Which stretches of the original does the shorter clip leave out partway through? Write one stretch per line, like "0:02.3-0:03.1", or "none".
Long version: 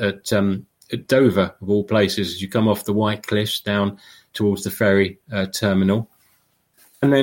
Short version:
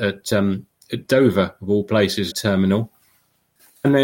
0:02.3-0:05.5